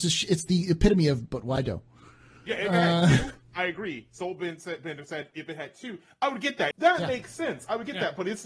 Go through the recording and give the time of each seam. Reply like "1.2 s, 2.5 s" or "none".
6.7 s